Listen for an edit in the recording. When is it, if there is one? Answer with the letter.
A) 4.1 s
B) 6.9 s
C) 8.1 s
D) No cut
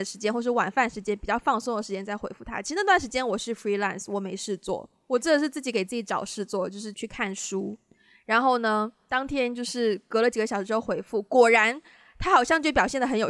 B